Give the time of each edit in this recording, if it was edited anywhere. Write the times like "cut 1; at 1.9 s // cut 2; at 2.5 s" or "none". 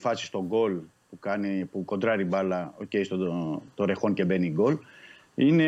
none